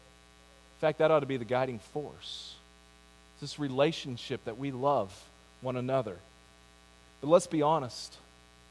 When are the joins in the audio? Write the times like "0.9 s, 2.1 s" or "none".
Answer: none

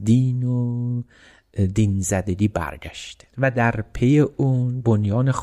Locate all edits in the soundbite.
3.3 s

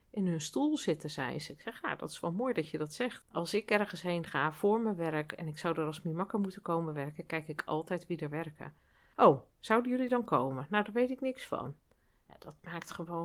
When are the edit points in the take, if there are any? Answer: 3.2 s, 9.1 s

